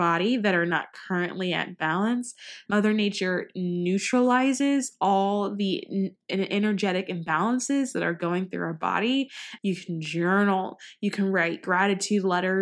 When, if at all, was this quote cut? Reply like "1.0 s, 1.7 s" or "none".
2.7 s, 9.6 s